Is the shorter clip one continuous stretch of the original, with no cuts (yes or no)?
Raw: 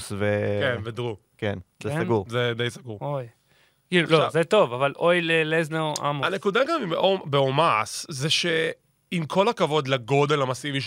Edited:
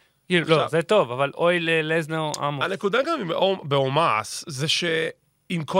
yes